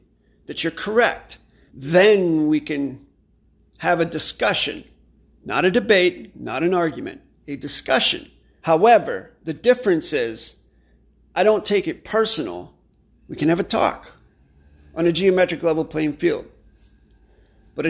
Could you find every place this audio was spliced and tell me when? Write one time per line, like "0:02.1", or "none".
0:01.7
0:08.6
0:13.1